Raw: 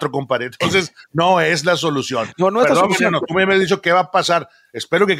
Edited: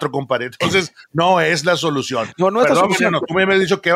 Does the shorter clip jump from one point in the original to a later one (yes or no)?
no